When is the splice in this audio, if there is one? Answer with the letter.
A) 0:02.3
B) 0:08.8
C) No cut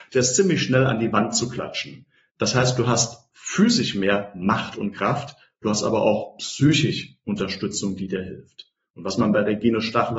A